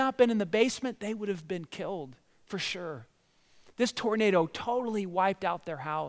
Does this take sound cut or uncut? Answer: uncut